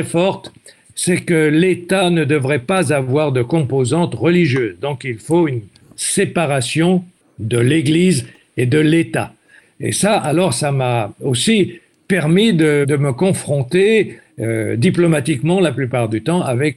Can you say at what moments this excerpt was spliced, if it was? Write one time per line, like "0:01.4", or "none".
0:09.6